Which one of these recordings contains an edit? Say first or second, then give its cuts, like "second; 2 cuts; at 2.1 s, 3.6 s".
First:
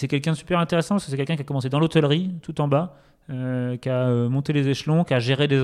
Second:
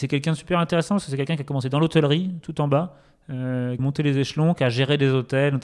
second; 1 cut; at 3.8 s